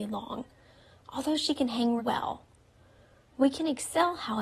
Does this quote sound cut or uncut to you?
cut